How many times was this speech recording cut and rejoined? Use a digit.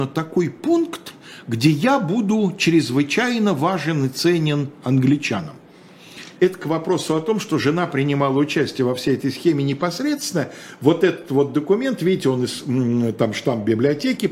1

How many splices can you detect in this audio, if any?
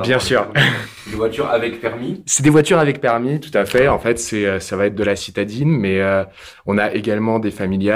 0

